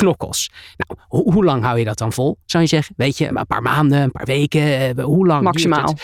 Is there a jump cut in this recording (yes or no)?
yes